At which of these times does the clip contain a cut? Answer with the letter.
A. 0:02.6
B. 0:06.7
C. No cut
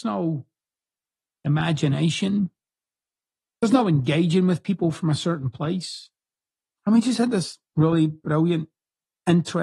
B